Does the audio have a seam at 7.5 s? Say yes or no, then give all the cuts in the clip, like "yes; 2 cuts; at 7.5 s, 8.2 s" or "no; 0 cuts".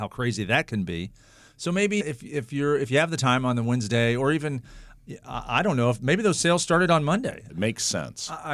yes; 2 cuts; at 2.0 s, 7.5 s